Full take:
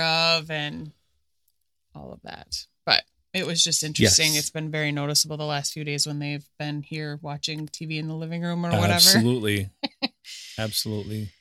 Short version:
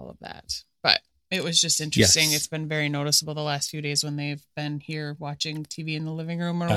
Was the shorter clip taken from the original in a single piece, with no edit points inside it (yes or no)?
yes